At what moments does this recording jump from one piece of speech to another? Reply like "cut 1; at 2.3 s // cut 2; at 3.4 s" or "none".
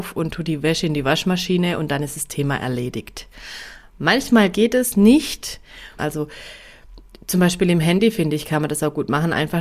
cut 1; at 6.0 s

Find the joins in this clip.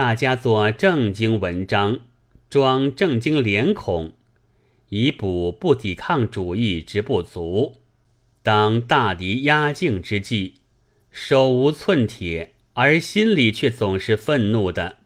cut 1; at 8.3 s // cut 2; at 12.7 s

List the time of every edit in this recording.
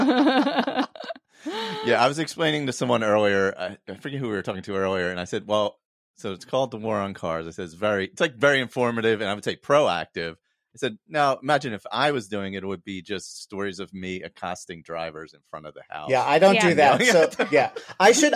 none

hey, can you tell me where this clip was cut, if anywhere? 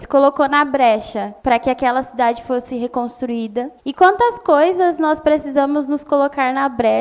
cut 1; at 1.4 s // cut 2; at 3.8 s

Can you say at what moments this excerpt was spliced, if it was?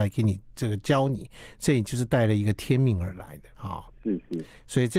cut 1; at 3.5 s

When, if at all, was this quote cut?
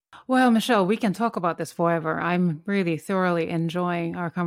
none

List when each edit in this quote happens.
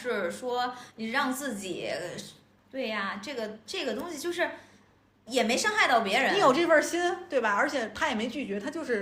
cut 1; at 2.6 s

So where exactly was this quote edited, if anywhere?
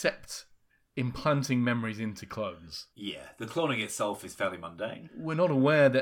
cut 1; at 2.9 s

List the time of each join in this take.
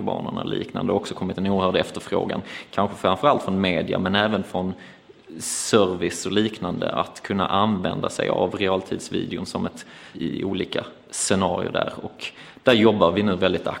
cut 1; at 10.1 s

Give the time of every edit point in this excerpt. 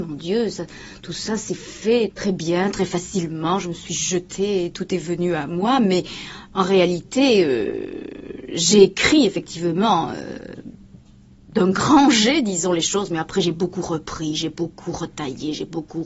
none

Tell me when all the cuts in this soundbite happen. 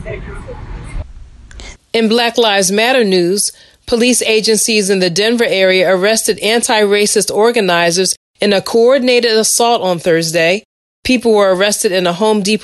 cut 1; at 1.8 s

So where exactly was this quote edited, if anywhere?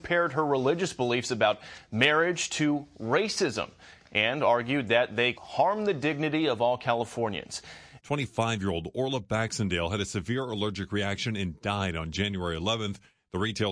cut 1; at 5.4 s // cut 2; at 8.0 s

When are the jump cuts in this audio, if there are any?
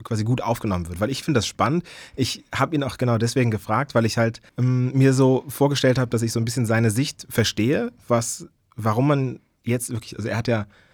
cut 1; at 4.5 s

